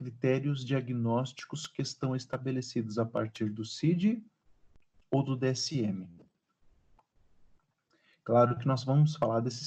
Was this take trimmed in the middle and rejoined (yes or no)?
no